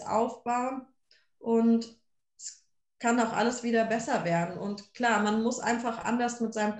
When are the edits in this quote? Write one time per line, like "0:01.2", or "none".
none

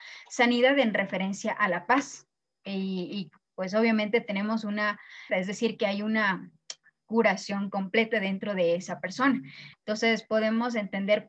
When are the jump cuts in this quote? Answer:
0:05.3
0:09.7

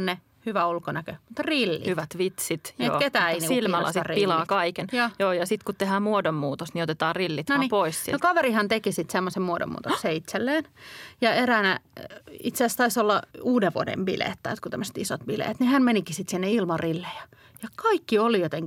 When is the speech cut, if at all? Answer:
0:13.3

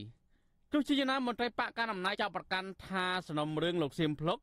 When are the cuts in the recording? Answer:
0:02.1

